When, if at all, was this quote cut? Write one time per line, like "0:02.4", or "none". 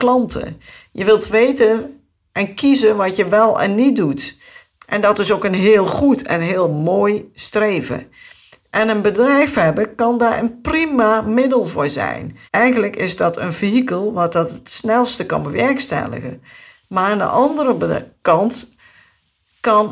0:04.8
0:12.5